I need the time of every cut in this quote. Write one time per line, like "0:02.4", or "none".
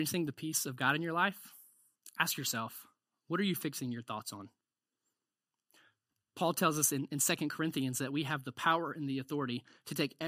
none

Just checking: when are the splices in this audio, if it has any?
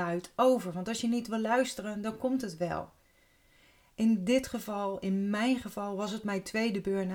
none

